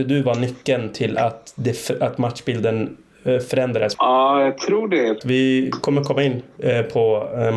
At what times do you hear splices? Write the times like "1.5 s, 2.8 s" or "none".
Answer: 3.9 s, 5.2 s